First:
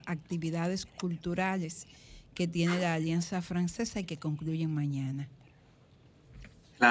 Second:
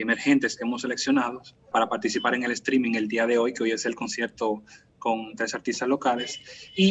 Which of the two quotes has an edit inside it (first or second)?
second